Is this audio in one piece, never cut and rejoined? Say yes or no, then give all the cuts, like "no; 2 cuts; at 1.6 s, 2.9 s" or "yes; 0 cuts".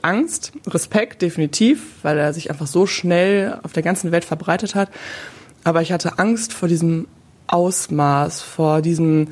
yes; 0 cuts